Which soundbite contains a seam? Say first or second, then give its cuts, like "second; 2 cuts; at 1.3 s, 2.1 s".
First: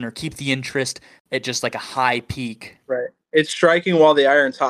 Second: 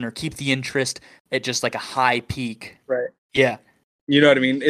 second; 1 cut; at 3.2 s